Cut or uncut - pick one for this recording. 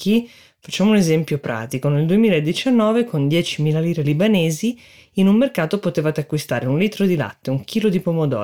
uncut